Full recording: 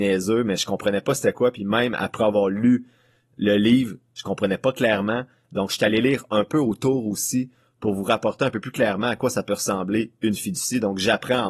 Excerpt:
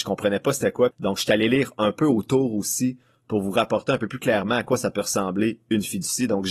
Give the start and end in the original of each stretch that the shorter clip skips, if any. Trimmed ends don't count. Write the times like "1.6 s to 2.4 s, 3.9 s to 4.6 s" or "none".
1.5 s to 5.4 s